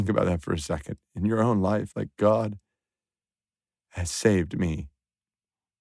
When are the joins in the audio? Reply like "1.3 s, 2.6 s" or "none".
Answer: 1.9 s